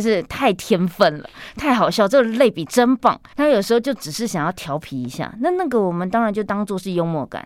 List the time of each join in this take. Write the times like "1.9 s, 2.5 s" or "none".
3.3 s